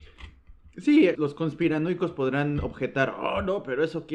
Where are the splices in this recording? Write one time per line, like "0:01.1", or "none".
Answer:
0:01.2